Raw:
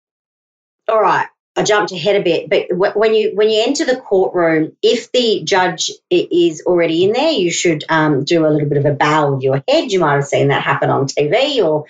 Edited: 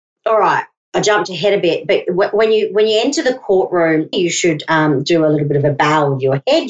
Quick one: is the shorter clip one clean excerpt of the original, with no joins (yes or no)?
no